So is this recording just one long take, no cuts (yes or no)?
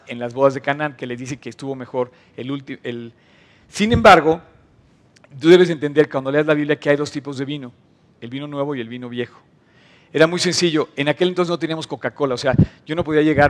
yes